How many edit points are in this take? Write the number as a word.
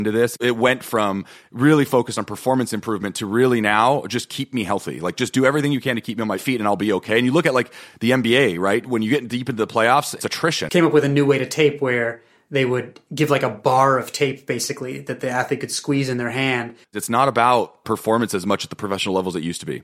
two